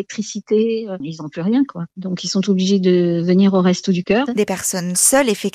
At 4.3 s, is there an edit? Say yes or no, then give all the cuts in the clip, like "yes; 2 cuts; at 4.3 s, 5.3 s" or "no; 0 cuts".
yes; 1 cut; at 4.3 s